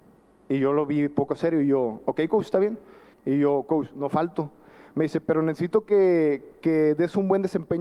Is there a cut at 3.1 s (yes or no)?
yes